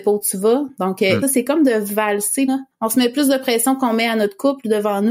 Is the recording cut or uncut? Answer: cut